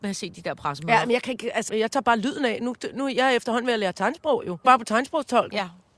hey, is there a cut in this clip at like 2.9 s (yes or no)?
no